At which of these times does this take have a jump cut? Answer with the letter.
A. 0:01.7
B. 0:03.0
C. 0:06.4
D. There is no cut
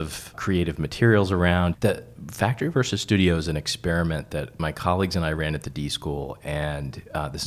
A